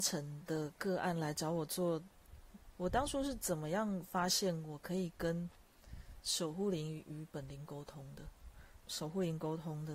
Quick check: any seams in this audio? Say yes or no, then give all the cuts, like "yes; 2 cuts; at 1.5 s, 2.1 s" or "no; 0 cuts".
yes; 2 cuts; at 2.7 s, 8.8 s